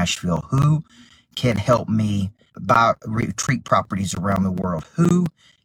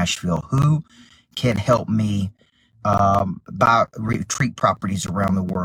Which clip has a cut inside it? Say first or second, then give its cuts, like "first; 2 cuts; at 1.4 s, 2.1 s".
first; 1 cut; at 2.5 s